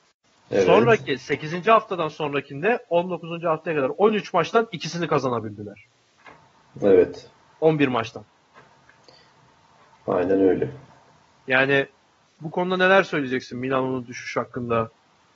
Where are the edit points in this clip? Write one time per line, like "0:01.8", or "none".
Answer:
none